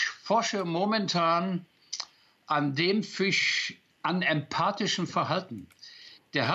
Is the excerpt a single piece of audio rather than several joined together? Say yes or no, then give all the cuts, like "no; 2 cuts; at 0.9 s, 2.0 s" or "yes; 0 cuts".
no; 1 cut; at 3.9 s